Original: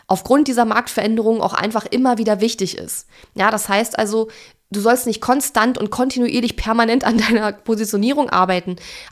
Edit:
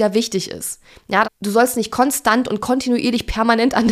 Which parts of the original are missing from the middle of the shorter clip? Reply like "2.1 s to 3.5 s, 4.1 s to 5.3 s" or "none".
3.5 s to 4.5 s